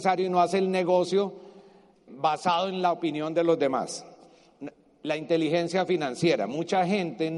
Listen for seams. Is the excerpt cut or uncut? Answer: cut